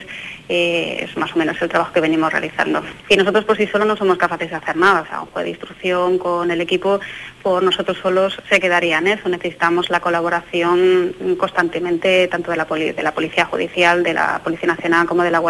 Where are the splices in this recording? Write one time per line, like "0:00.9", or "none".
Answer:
0:03.0